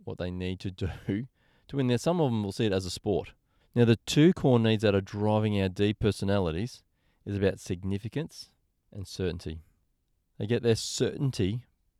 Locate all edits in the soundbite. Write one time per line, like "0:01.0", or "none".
0:03.6

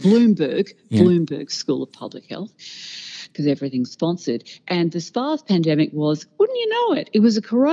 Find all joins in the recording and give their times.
none

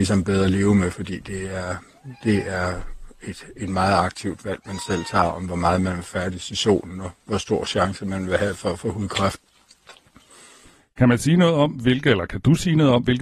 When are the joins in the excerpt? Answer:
none

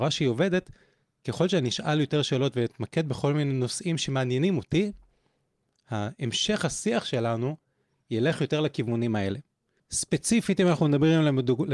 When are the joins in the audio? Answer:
0:09.8

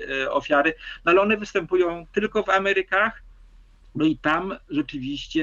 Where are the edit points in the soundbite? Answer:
none

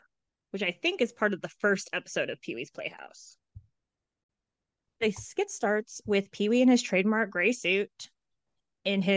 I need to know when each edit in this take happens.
none

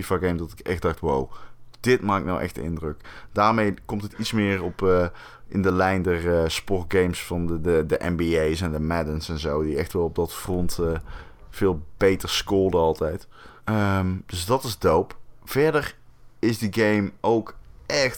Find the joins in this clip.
0:13.6

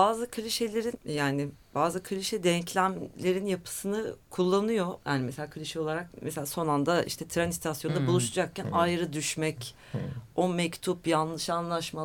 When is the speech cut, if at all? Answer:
0:00.9

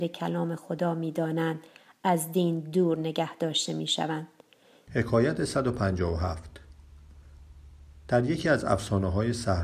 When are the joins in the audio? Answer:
0:04.9

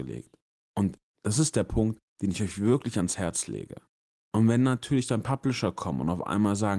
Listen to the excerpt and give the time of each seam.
0:04.1

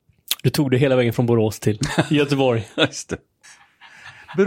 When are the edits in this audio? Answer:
0:03.4

